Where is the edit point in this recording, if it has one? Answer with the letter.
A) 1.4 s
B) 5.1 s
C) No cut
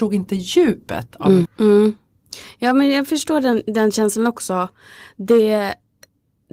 A